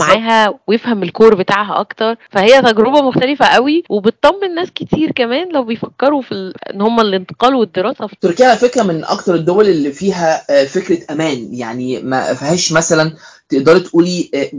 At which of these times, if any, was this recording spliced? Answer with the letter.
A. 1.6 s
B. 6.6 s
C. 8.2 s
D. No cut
C